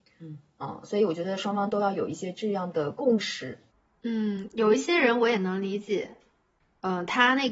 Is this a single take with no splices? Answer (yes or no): yes